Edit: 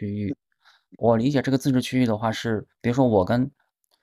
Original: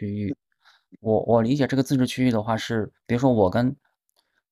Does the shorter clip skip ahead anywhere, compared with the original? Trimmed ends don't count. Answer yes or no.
yes